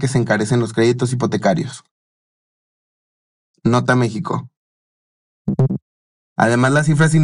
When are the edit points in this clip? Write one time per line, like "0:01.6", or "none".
0:06.2

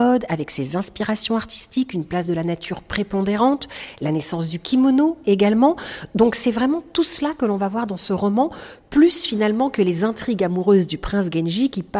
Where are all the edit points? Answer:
none

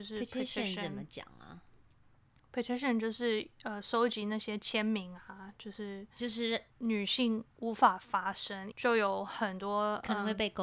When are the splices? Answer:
0:06.7
0:08.7

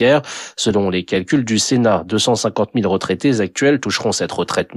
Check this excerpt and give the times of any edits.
none

